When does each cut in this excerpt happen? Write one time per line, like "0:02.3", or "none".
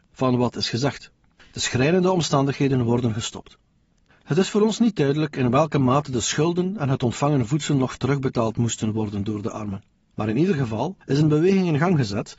0:01.3